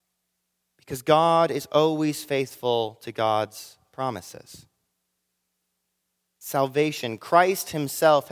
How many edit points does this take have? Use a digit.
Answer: 0